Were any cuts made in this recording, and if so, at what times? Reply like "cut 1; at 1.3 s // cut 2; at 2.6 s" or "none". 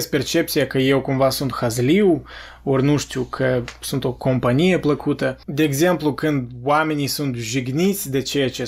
cut 1; at 5.4 s